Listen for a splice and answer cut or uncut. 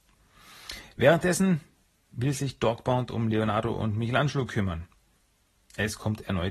uncut